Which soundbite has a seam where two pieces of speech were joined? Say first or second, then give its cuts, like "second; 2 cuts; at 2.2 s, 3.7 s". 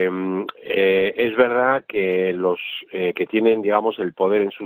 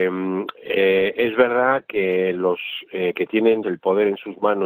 second; 1 cut; at 3.6 s